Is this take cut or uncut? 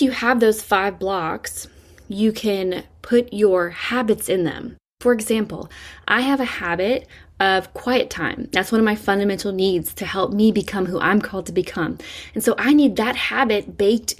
uncut